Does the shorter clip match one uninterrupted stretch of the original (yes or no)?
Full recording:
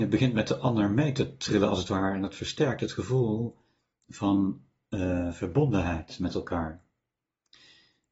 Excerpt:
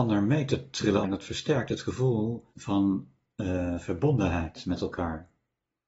no